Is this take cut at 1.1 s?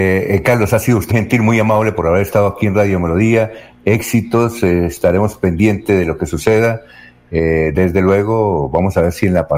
yes; 1 cut; at 1.1 s

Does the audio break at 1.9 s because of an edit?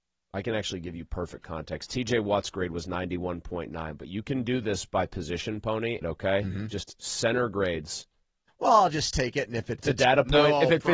no; 2 cuts; at 6.0 s, 8.5 s

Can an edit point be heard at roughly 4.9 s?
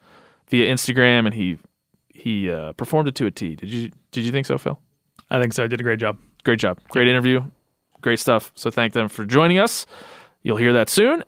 no; 0 cuts

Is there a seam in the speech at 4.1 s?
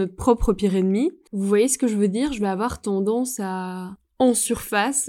no; 1 cut; at 1.3 s

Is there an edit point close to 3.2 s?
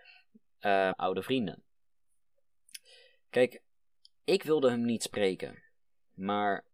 no; 1 cut; at 0.9 s

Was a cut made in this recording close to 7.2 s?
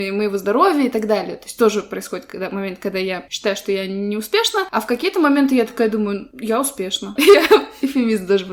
yes; 1 cut; at 7.2 s

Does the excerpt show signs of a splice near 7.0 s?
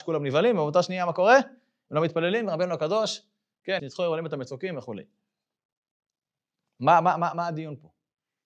no; 1 cut; at 3.8 s

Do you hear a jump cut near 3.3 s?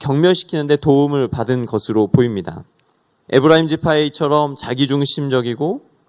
yes; 1 cut; at 3.3 s

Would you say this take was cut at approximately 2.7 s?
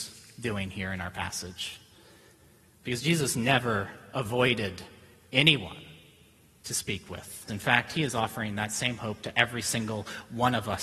no; 1 cut; at 7.5 s

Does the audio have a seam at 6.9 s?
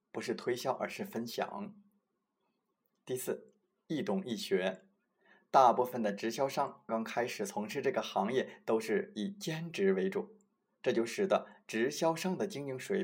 yes; 1 cut; at 6.9 s

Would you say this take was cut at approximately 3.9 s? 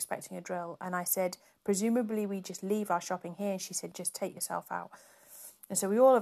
yes; 1 cut; at 3.9 s

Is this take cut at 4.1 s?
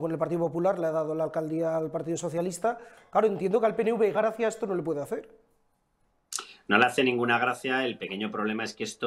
yes; 1 cut; at 4.1 s

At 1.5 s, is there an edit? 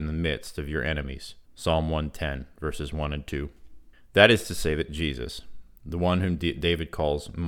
yes; 1 cut; at 1.5 s

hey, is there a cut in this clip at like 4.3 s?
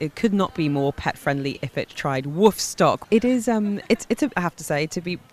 yes; 1 cut; at 4.3 s

